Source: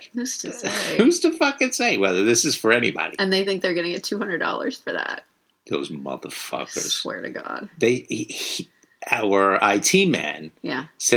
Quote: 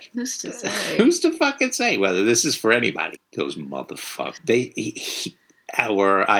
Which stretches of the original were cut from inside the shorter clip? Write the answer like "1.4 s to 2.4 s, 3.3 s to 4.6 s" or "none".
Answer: 3.2 s to 5.5 s, 6.7 s to 7.7 s